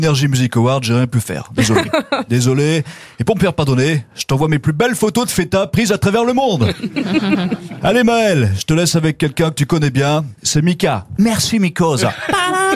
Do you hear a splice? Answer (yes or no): no